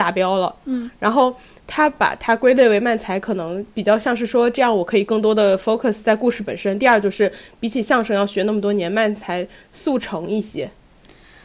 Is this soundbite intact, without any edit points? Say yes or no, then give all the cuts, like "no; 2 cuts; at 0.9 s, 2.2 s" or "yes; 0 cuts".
yes; 0 cuts